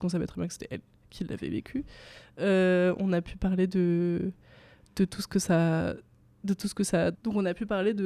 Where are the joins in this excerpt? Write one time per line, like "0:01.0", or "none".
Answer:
0:07.1